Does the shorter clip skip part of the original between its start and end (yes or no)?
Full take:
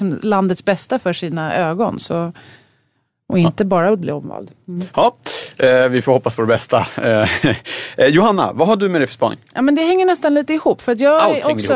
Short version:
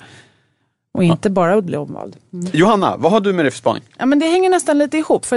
yes